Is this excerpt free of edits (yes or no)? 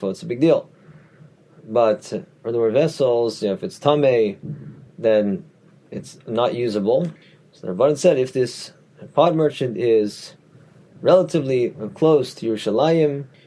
yes